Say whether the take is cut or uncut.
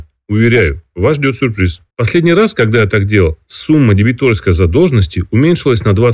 cut